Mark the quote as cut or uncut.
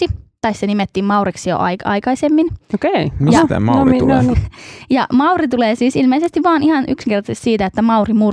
cut